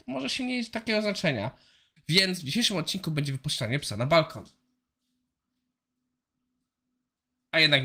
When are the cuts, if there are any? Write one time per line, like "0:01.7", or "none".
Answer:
0:02.0